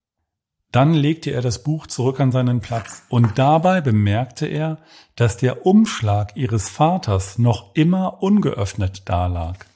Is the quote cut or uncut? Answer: uncut